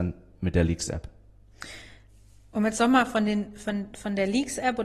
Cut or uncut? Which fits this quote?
uncut